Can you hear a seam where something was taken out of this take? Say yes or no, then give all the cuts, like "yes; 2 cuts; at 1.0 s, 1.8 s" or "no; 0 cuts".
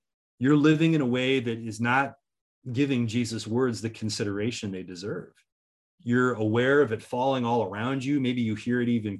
no; 0 cuts